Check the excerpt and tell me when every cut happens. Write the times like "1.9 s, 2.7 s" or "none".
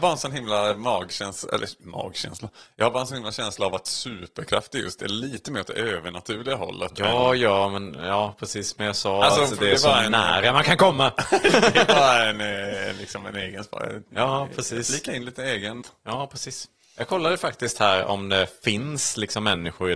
15.8 s